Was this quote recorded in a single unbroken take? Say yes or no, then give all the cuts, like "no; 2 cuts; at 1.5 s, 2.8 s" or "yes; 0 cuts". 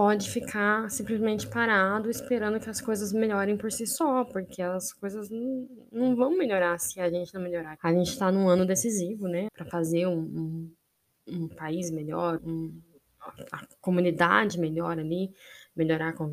no; 3 cuts; at 7.8 s, 9.5 s, 12.4 s